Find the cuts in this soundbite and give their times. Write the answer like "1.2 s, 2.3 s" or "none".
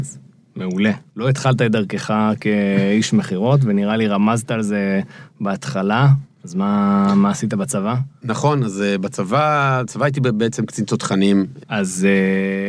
1.1 s, 11.6 s